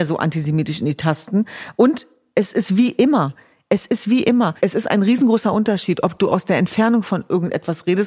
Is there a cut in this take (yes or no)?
no